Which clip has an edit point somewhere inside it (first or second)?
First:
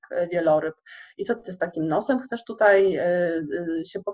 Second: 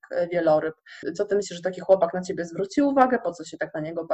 second